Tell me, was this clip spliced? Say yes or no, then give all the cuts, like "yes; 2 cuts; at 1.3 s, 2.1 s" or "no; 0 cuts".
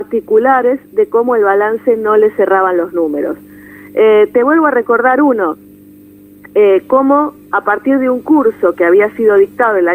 no; 0 cuts